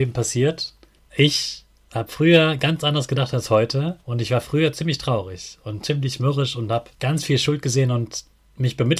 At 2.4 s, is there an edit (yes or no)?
no